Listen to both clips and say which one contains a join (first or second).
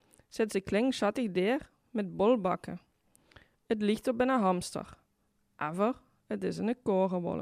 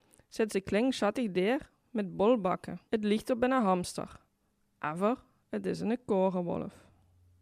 second